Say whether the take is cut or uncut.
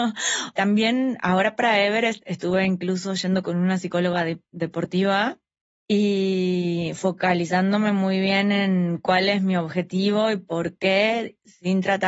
uncut